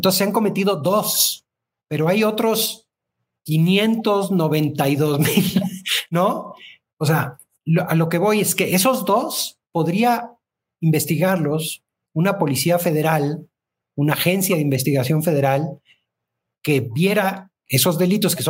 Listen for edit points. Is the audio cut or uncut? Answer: cut